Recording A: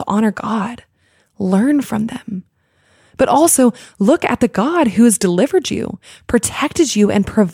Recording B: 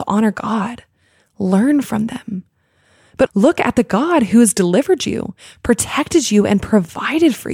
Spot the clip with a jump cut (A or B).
B